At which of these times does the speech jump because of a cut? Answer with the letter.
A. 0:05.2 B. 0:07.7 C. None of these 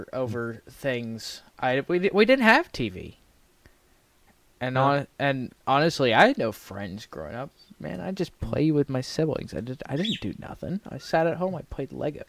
C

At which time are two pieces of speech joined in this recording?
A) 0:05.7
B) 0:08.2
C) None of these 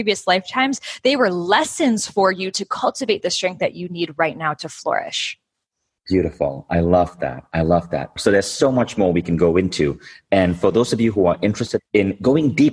B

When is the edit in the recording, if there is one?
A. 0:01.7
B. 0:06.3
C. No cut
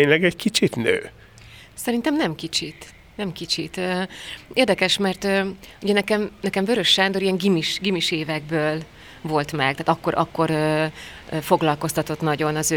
C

